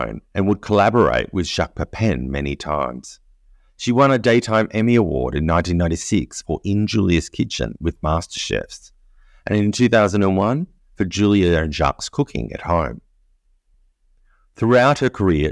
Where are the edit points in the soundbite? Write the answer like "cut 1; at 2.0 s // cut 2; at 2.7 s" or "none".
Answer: none